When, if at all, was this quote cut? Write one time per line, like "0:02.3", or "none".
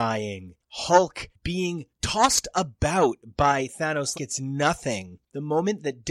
0:04.1